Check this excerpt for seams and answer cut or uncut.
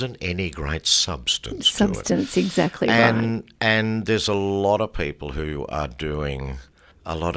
uncut